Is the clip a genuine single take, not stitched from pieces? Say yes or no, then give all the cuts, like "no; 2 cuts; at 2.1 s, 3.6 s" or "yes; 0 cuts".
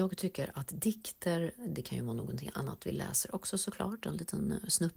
yes; 0 cuts